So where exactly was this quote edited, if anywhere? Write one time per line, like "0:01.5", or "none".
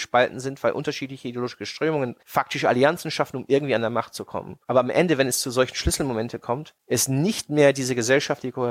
0:02.2